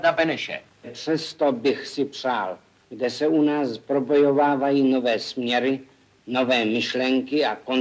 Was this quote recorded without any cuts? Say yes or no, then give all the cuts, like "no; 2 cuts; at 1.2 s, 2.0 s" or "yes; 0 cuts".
no; 1 cut; at 2.8 s